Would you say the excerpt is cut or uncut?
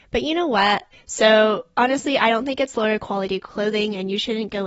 cut